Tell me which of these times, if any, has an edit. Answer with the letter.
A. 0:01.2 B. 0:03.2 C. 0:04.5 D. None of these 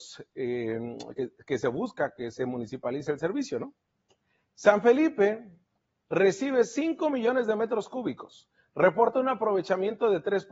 D